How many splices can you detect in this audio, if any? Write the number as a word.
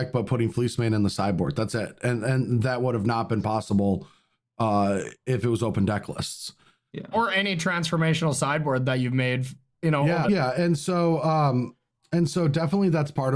two